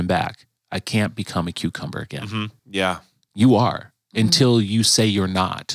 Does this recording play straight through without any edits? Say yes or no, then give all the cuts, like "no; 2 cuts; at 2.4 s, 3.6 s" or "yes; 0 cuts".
no; 1 cut; at 2.6 s